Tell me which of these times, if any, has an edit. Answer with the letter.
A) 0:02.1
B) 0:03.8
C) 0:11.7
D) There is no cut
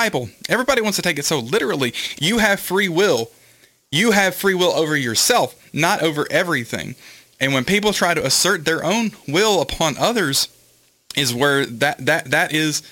A